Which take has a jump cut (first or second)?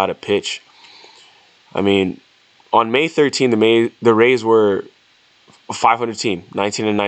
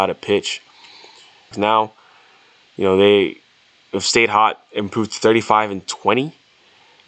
second